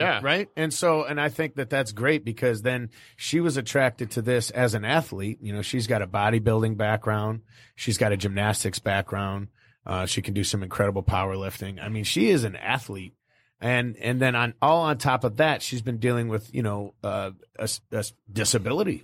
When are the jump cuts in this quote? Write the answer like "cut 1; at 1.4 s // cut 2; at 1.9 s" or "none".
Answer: none